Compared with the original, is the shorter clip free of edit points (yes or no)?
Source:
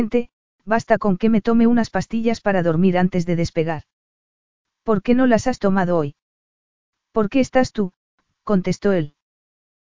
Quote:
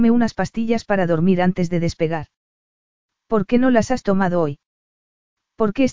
yes